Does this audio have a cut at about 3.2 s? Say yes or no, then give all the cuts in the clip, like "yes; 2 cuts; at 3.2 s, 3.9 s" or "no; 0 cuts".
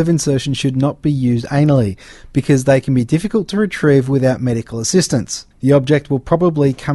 no; 1 cut; at 5.5 s